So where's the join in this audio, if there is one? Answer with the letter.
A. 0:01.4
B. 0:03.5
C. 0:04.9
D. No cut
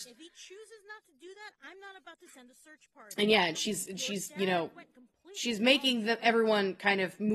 D